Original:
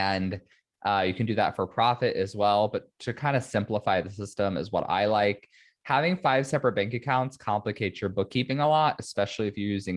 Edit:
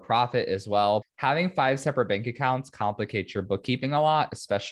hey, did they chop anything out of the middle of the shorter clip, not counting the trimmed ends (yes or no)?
yes